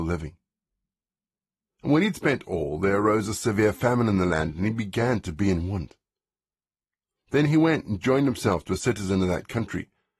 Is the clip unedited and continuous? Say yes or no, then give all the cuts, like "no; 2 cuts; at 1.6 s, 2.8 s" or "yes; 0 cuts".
yes; 0 cuts